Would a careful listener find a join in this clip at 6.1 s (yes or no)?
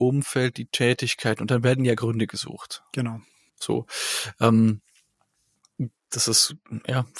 yes